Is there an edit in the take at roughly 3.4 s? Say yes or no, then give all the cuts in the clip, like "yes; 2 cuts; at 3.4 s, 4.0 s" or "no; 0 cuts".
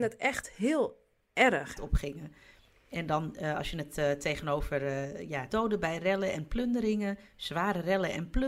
no; 2 cuts; at 1.8 s, 5.5 s